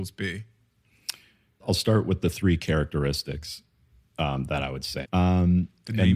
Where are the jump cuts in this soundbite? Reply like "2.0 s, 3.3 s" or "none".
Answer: 5.0 s